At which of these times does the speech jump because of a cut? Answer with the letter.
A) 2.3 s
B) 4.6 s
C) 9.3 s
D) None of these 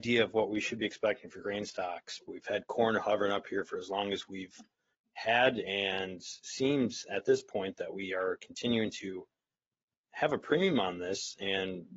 A